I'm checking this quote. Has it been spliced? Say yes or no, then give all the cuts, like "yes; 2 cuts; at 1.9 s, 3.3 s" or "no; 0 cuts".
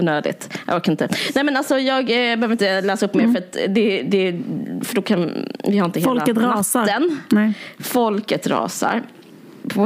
no; 0 cuts